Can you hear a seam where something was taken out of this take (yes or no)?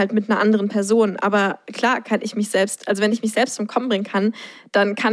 no